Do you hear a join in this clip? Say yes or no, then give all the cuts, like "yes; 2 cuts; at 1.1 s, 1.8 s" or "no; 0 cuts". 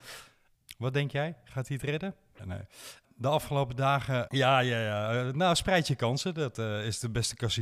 yes; 2 cuts; at 2.4 s, 4.3 s